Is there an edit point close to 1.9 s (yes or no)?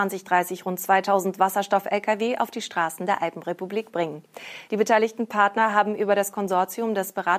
no